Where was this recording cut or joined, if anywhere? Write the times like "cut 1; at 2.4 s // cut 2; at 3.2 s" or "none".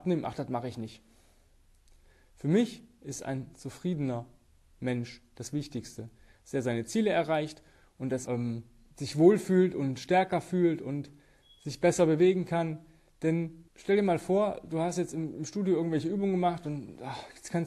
cut 1; at 8.3 s // cut 2; at 13.7 s